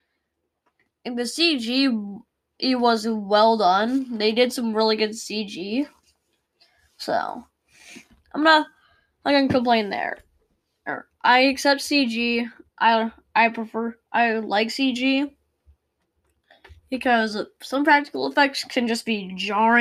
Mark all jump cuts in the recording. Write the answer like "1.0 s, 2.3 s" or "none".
none